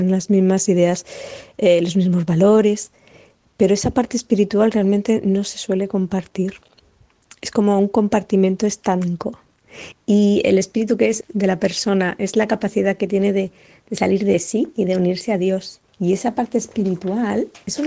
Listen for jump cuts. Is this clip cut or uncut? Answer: cut